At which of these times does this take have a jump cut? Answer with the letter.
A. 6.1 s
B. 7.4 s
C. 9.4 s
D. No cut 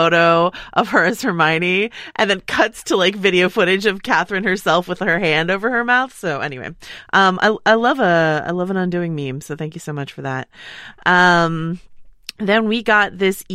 D